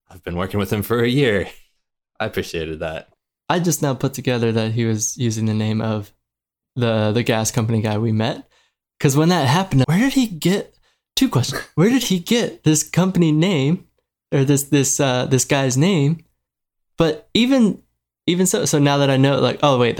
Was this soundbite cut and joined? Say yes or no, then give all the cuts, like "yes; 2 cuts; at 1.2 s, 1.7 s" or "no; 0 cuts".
yes; 1 cut; at 9.8 s